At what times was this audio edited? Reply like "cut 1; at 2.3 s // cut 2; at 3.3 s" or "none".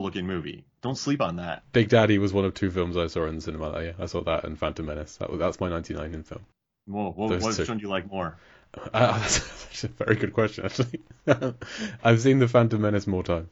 none